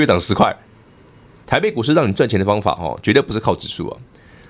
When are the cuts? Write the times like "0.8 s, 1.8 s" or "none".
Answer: 1.4 s